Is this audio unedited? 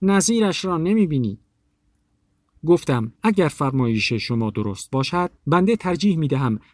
no; 2 cuts; at 3.2 s, 5.4 s

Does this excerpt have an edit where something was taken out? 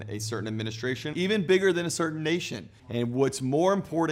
yes; 2 cuts; at 1.1 s, 2.8 s

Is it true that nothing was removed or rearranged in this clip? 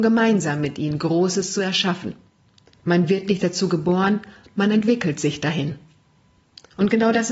no; 1 cut; at 2.7 s

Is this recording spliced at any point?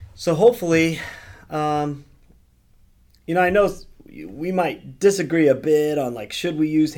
no; 0 cuts

